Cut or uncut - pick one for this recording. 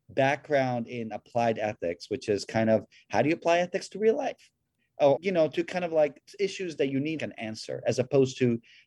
cut